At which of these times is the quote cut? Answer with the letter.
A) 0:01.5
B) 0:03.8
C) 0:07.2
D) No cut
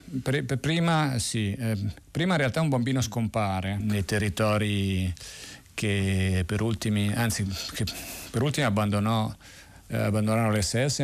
B